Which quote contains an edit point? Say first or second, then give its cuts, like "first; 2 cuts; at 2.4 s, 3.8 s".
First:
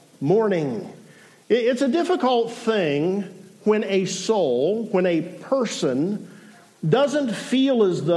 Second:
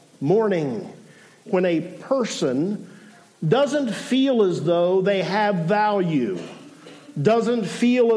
second; 1 cut; at 1.5 s